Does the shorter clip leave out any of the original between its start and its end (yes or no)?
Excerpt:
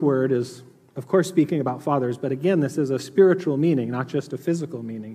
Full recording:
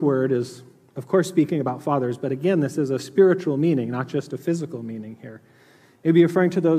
no